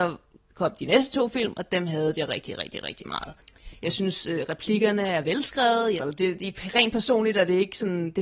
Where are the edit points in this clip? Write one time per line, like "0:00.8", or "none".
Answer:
0:03.8
0:06.0